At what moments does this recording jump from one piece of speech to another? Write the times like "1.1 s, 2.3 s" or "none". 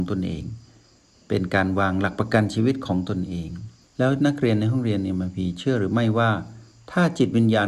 none